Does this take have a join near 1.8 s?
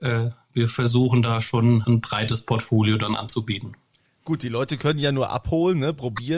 yes; 1 cut; at 1.8 s

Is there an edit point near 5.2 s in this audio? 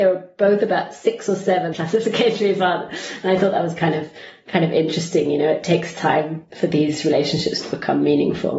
no; 1 cut; at 1.7 s

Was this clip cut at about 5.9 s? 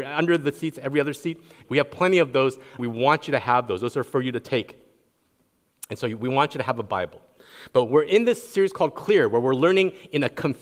no; 2 cuts; at 1.6 s, 2.8 s

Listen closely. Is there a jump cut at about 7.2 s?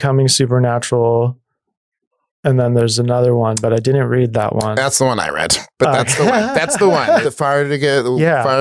yes; 1 cut; at 7.2 s

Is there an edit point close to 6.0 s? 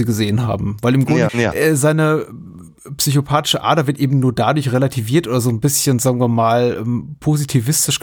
no; 1 cut; at 1.3 s

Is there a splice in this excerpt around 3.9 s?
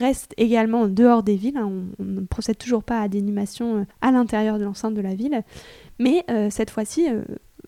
yes; 1 cut; at 3.9 s

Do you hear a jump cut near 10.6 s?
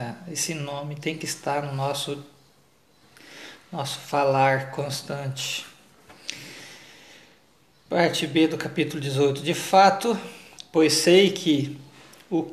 yes; 1 cut; at 10.6 s

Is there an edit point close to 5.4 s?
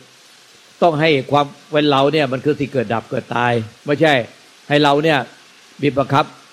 no; 1 cut; at 3.8 s

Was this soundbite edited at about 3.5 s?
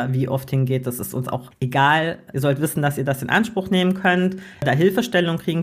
no; 1 cut; at 2.3 s

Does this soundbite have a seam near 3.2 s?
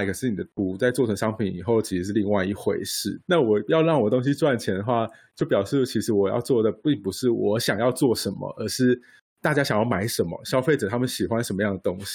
yes; 1 cut; at 3.2 s

